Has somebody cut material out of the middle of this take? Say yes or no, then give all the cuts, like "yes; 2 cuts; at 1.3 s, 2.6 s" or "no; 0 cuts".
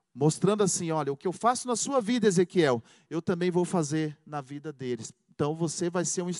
no; 0 cuts